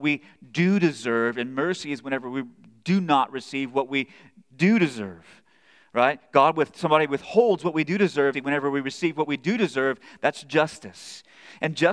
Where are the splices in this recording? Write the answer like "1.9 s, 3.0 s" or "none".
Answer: 8.3 s